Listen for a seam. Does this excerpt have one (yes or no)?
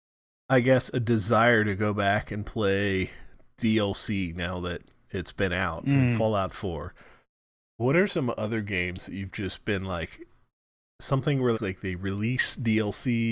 yes